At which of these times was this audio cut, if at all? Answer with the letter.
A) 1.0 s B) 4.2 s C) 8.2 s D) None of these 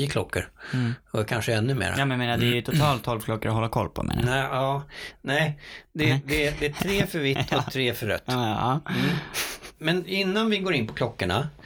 D